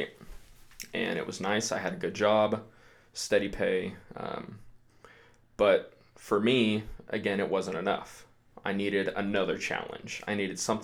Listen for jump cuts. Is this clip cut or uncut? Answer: uncut